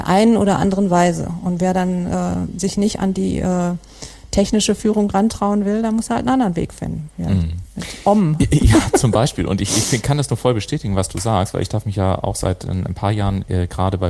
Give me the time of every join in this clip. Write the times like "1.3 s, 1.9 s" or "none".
8.4 s